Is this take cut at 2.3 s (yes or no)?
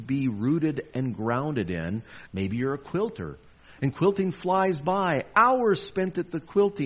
yes